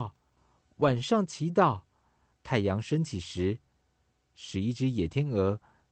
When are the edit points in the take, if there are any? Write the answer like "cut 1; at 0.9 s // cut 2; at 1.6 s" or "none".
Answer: cut 1; at 2.3 s // cut 2; at 4.2 s